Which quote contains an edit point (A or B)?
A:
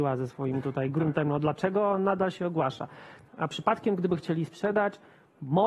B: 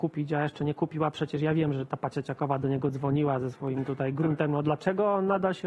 A